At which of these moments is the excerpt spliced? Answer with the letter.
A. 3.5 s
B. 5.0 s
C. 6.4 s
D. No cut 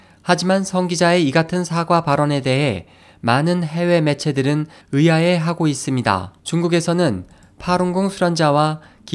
C